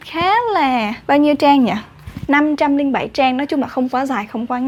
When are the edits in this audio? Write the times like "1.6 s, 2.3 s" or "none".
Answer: 1.0 s